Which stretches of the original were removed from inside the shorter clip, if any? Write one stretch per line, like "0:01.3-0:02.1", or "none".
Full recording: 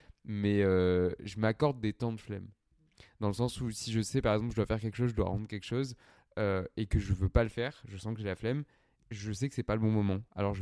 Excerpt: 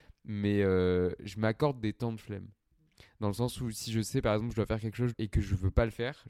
0:05.1-0:06.7